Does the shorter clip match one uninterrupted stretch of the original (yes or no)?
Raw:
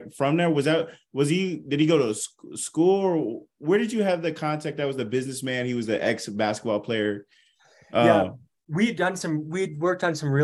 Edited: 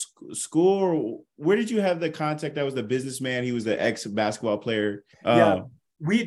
no